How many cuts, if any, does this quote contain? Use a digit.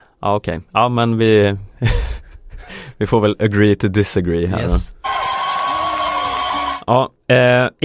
0